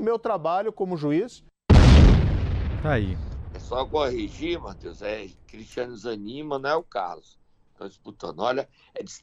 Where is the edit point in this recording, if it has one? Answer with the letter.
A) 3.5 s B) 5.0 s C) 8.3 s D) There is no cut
D